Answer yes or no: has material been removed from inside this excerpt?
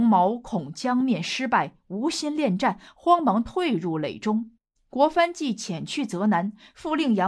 yes